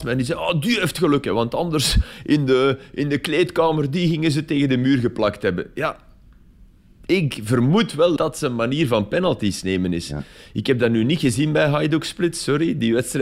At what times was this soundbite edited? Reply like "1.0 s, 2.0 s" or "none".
8.2 s